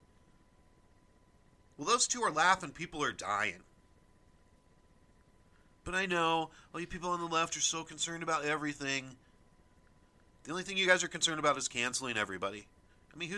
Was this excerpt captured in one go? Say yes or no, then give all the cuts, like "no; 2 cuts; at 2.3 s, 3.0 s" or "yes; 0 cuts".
yes; 0 cuts